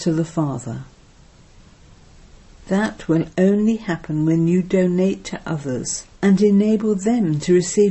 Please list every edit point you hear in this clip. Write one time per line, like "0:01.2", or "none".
0:02.6
0:06.1